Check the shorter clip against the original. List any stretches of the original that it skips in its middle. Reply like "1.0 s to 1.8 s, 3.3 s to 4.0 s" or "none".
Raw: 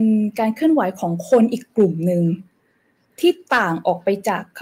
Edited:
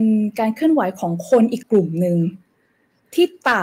1.6 s to 1.7 s